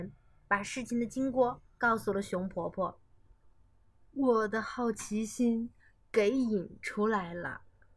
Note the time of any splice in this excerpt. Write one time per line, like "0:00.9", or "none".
none